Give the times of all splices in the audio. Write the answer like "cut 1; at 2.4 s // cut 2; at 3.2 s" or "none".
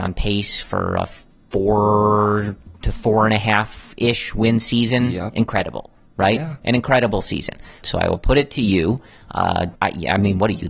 cut 1; at 7.8 s // cut 2; at 9.7 s